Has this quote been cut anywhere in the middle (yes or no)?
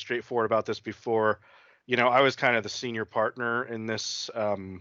no